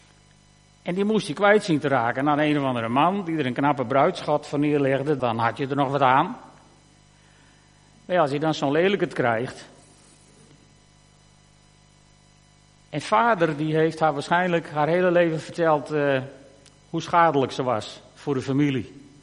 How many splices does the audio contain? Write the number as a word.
one